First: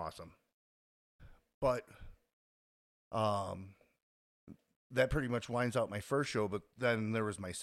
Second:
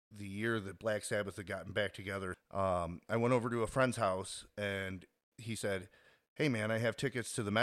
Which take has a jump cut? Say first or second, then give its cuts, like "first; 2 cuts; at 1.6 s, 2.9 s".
second; 1 cut; at 2.3 s